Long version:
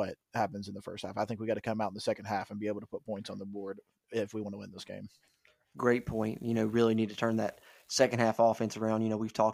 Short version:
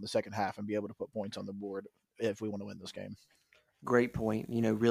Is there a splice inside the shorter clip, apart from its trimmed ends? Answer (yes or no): no